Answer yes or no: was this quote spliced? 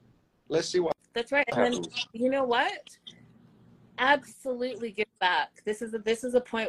no